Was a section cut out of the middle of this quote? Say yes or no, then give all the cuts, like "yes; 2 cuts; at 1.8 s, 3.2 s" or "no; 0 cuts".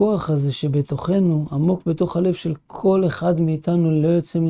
no; 0 cuts